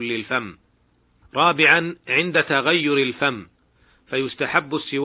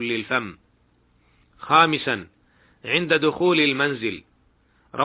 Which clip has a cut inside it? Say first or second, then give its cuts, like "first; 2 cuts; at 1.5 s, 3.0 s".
first; 1 cut; at 1.2 s